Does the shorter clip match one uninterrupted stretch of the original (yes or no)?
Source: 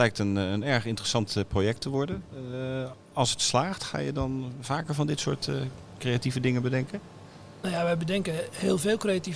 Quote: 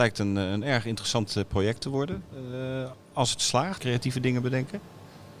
no